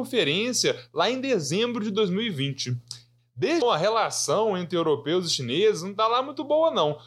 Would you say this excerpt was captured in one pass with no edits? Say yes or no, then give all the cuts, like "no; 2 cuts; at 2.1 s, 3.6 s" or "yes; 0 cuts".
no; 1 cut; at 3.6 s